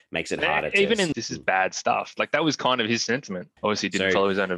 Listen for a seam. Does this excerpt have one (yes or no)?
yes